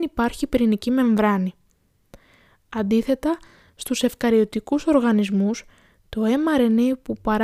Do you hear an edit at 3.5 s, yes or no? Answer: no